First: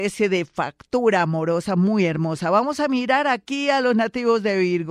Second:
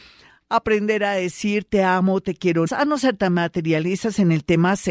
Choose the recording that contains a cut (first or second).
second